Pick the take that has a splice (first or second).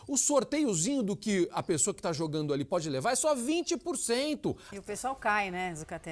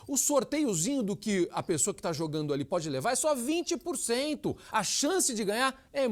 first